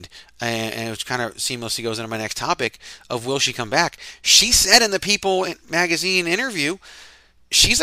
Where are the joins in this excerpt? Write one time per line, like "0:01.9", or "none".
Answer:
none